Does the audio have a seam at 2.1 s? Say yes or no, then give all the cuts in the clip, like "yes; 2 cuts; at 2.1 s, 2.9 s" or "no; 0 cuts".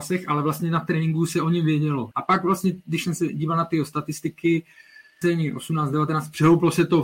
yes; 2 cuts; at 2.1 s, 5.2 s